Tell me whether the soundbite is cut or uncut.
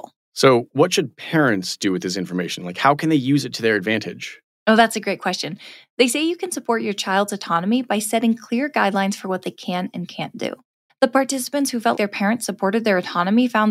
cut